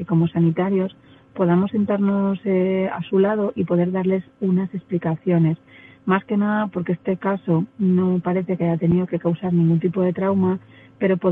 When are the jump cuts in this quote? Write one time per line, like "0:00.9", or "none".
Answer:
none